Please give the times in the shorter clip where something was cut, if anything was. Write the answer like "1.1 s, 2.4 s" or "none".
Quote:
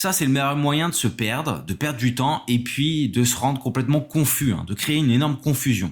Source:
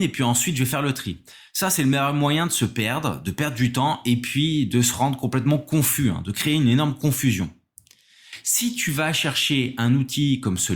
none